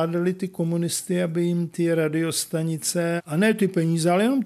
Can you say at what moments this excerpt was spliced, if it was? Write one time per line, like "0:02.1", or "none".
0:03.2